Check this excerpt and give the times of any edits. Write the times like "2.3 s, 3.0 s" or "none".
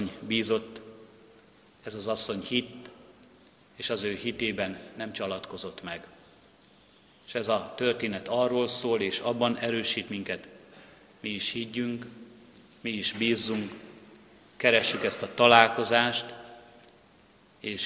none